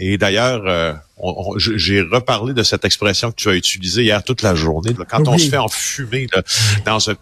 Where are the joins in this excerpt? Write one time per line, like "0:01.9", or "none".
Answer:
0:04.9